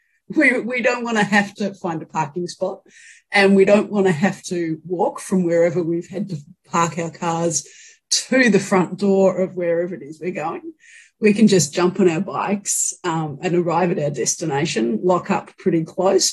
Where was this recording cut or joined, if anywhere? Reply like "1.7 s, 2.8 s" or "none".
none